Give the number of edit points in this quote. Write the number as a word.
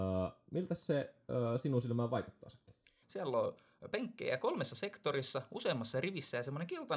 one